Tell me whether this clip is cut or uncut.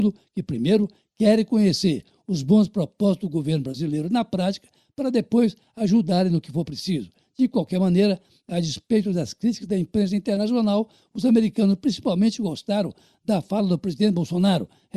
cut